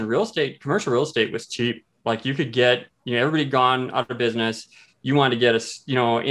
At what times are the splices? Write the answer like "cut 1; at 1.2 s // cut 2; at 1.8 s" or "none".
none

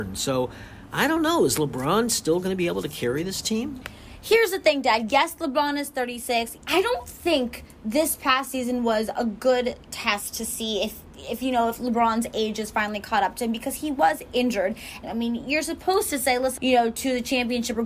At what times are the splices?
cut 1; at 6.6 s // cut 2; at 15.0 s // cut 3; at 16.6 s

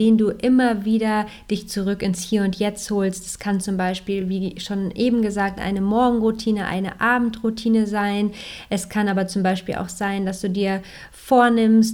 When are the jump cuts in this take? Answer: none

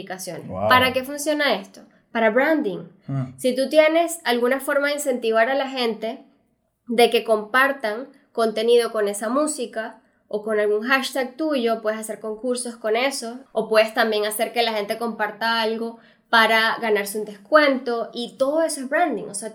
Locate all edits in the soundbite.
cut 1; at 13.5 s

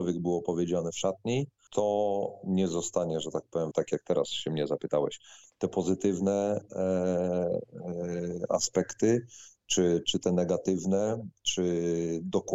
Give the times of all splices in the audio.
cut 1; at 3.7 s

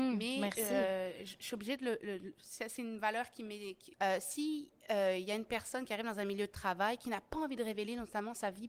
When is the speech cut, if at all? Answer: cut 1; at 3.9 s

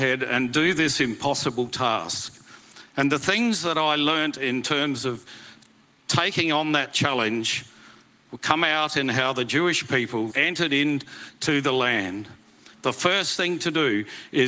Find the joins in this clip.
cut 1; at 10.3 s // cut 2; at 12.7 s

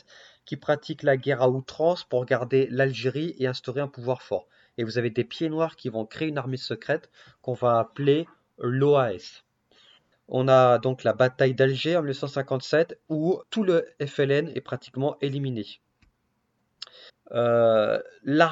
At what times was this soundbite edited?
cut 1; at 10.1 s // cut 2; at 13.4 s // cut 3; at 17.1 s

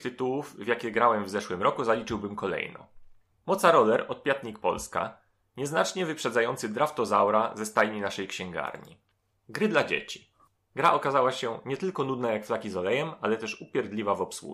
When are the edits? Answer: cut 1; at 3.4 s // cut 2; at 10.6 s

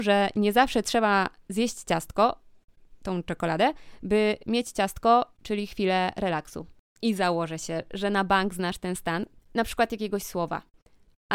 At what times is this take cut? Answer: cut 1; at 7.0 s // cut 2; at 9.4 s

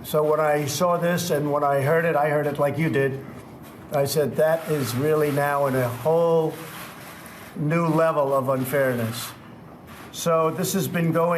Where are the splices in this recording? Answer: none

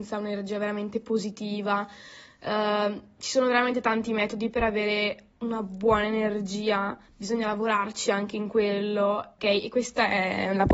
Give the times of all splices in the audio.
cut 1; at 9.4 s

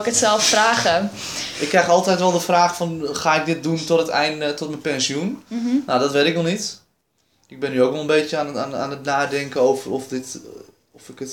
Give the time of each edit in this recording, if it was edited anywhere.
none

